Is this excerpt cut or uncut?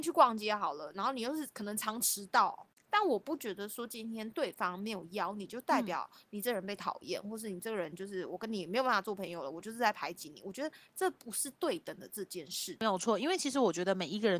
cut